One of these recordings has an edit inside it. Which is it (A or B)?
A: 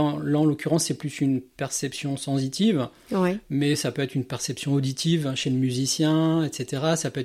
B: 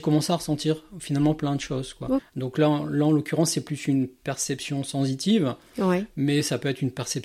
B